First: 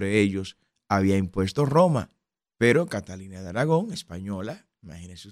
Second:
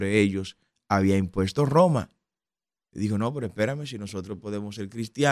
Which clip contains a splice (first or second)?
first